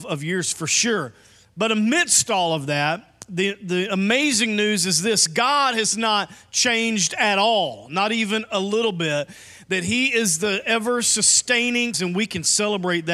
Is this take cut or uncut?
cut